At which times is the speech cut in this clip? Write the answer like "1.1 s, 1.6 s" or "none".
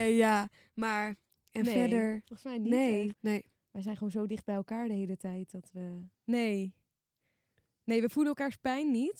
3.1 s, 6.1 s